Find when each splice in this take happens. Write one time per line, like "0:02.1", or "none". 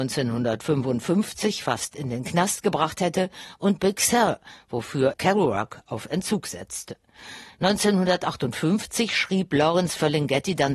0:05.1